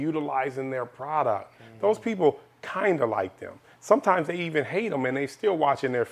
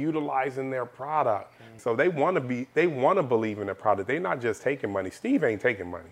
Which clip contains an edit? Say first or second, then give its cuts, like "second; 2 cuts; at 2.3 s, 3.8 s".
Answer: second; 1 cut; at 1.8 s